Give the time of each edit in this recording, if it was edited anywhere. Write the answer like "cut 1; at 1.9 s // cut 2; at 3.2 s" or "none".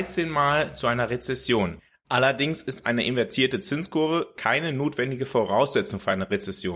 none